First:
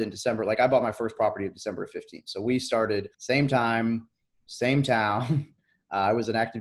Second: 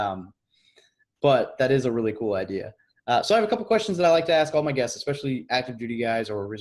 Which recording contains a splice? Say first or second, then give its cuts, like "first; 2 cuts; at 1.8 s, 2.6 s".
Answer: first; 1 cut; at 3.1 s